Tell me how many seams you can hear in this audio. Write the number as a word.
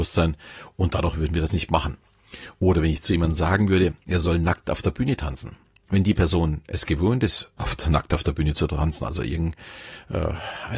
zero